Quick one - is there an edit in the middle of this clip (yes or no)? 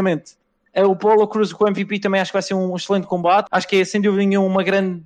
yes